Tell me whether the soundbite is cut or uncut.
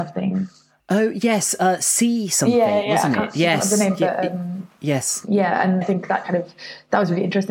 cut